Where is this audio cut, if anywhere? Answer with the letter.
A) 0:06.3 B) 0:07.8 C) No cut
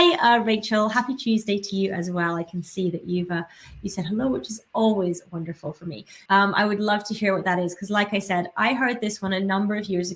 A